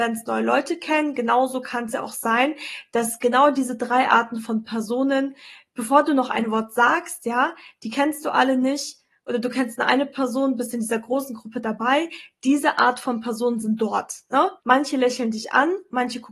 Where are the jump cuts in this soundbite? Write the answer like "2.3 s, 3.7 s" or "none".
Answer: 14.6 s